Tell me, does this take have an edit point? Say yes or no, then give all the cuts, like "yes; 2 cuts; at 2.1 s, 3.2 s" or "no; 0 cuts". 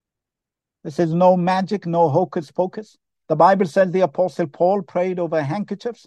yes; 1 cut; at 3.2 s